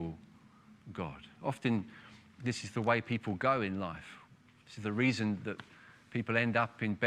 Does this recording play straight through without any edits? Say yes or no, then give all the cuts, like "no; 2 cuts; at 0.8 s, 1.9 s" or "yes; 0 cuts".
yes; 0 cuts